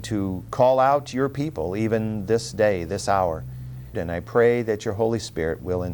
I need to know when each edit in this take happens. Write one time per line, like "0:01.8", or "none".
0:03.9